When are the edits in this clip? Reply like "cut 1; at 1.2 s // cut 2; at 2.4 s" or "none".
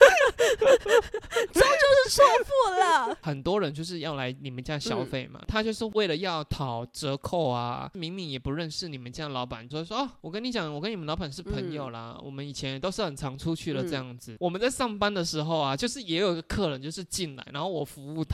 cut 1; at 3.2 s // cut 2; at 9.7 s // cut 3; at 14.4 s